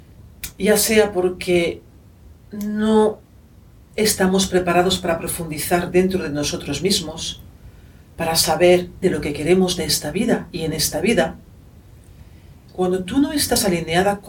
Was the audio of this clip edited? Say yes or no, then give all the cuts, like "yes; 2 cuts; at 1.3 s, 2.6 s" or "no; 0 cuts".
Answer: yes; 2 cuts; at 9.0 s, 12.7 s